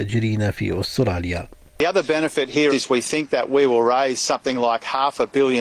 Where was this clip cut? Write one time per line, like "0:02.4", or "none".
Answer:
0:02.7